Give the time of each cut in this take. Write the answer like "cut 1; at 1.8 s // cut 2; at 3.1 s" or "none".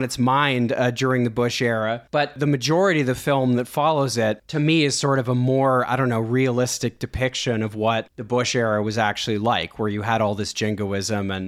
none